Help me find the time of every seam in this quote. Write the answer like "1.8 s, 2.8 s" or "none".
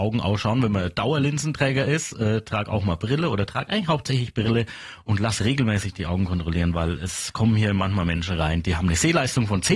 none